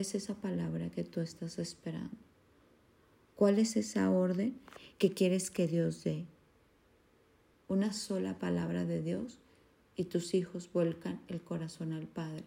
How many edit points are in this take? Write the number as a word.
one